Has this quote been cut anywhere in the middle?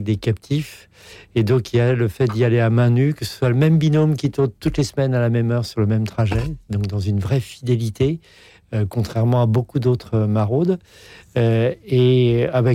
no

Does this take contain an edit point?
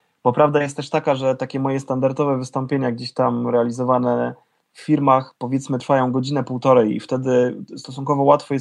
no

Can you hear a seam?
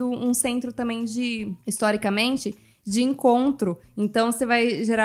no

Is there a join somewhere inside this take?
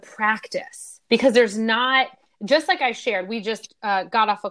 yes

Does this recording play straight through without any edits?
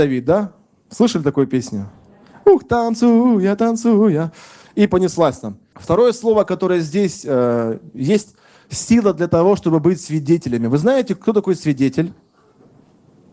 no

